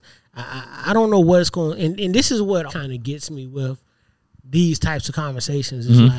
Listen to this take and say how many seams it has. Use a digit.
1